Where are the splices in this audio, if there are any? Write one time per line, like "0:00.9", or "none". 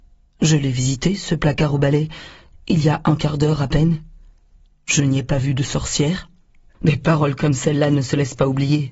0:06.7